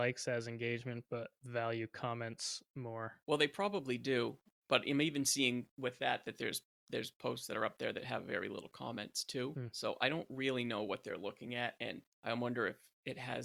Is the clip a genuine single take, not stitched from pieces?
yes; 0 cuts

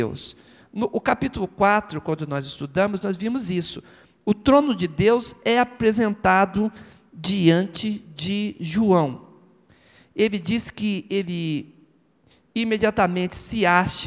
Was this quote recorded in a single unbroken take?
yes; 0 cuts

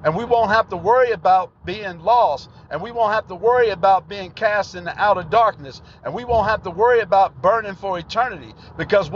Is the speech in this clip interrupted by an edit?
no; 0 cuts

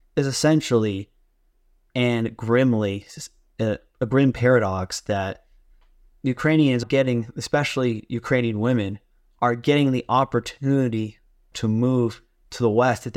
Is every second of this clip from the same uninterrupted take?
no; 2 cuts; at 6.8 s, 11.5 s

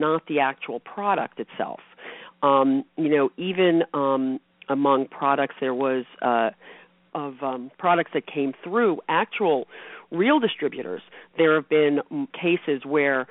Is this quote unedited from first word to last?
no; 2 cuts; at 7.1 s, 12.3 s

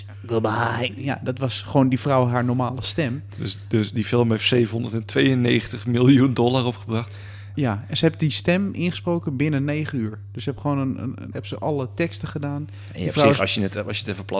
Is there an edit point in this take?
yes; 2 cuts; at 7.5 s, 11.3 s

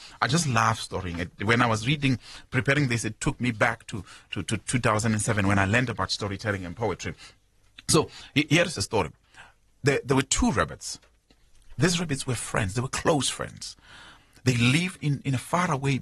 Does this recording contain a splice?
yes; 1 cut; at 15.0 s

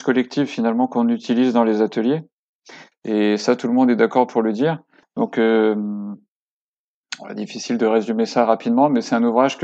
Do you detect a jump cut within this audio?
yes; 2 cuts; at 2.9 s, 5.0 s

